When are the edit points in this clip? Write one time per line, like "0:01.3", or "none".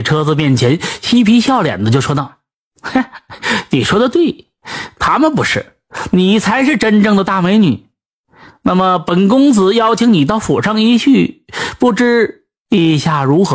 none